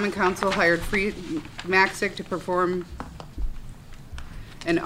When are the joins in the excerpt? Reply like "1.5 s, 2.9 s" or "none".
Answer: none